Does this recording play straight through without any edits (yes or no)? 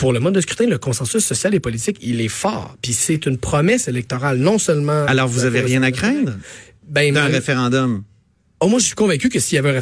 yes